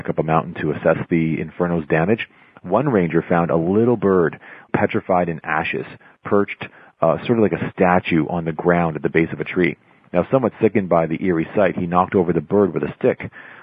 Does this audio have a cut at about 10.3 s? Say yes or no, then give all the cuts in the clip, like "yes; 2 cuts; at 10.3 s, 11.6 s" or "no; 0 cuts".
no; 1 cut; at 4.7 s